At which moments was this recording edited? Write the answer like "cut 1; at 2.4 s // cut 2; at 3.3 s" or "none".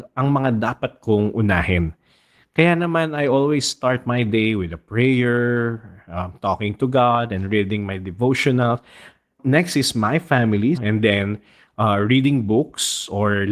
cut 1; at 10.7 s